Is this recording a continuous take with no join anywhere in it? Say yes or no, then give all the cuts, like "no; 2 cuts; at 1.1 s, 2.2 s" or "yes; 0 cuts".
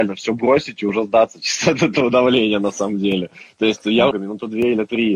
no; 1 cut; at 4.1 s